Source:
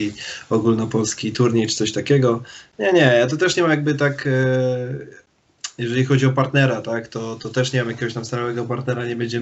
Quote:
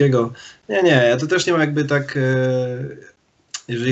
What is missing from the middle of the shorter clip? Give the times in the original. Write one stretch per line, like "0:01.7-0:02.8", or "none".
none